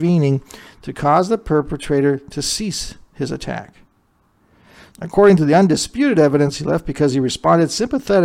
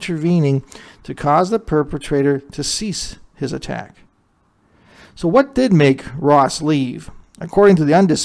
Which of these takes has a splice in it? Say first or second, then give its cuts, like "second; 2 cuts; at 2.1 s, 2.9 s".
first; 1 cut; at 4.9 s